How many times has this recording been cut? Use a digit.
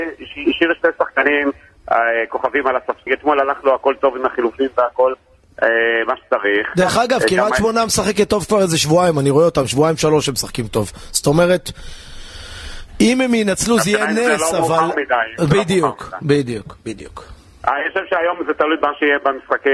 1